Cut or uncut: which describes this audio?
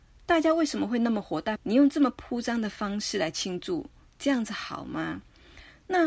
cut